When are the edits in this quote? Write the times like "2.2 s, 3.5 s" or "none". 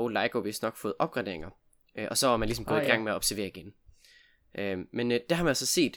none